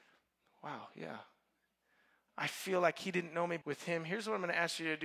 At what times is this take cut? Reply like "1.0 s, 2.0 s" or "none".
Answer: 2.3 s, 3.6 s